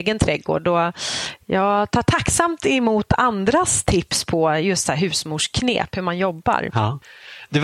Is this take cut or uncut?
uncut